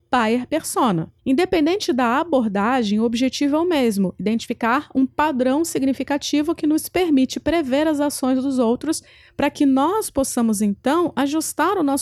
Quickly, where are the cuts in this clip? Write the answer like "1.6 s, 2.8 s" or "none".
1.2 s